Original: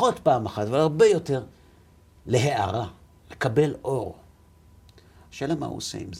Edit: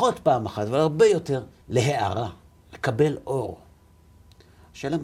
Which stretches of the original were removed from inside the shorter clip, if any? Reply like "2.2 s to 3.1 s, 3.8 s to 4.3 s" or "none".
1.6 s to 2.2 s

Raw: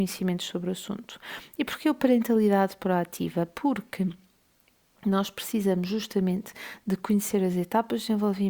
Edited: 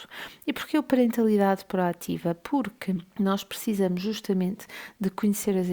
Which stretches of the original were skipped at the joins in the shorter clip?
4.2 s to 5.0 s

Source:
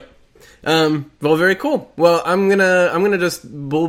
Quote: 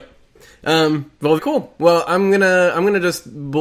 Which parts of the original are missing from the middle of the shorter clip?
1.4 s to 1.6 s

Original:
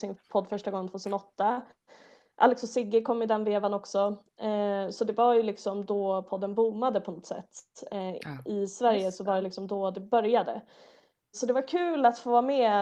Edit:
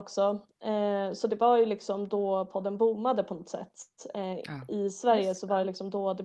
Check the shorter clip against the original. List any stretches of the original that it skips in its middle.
none

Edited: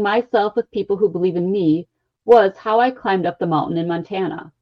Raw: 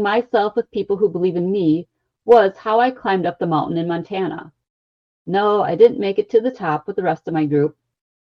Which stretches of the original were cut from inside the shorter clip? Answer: none

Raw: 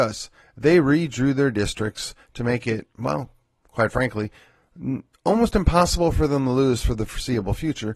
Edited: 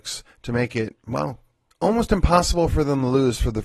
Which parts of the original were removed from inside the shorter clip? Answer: 3.6 s to 5.1 s

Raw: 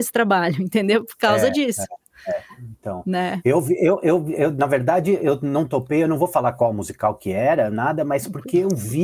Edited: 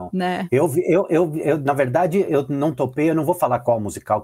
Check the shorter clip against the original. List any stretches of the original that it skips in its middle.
none

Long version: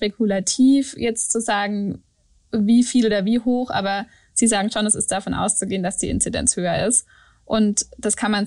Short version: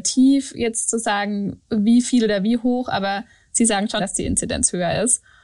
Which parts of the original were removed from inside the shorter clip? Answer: 2.1 s to 2.5 s, 4.8 s to 5.8 s

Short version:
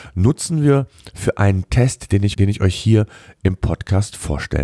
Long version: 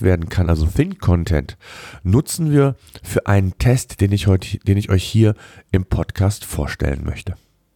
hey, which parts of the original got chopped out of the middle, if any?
4.2 s to 4.6 s

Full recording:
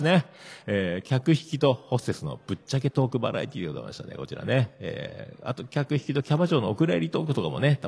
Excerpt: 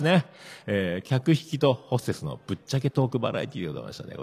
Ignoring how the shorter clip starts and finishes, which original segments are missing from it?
none

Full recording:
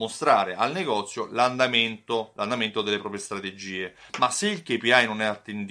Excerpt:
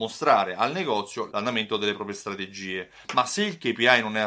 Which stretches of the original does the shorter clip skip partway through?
1.3 s to 2.3 s

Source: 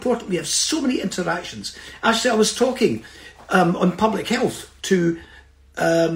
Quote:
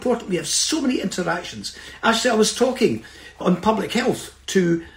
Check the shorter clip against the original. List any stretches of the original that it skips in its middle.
3.4 s to 3.8 s

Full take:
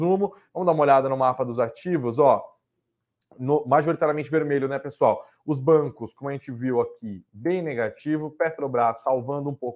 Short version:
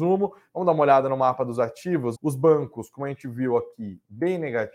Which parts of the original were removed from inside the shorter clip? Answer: 2.1 s to 5.4 s

